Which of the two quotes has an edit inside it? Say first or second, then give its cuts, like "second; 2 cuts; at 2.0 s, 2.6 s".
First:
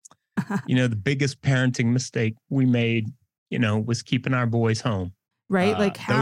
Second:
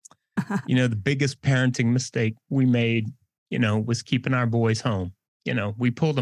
first; 1 cut; at 5.3 s